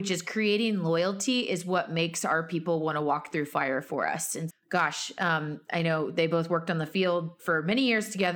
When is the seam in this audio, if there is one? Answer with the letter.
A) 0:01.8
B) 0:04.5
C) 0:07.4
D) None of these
B